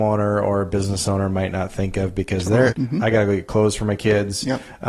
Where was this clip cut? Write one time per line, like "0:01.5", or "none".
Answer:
0:02.7